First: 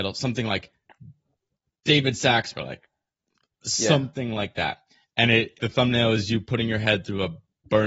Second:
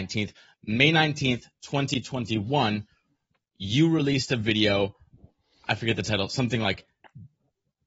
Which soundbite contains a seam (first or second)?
first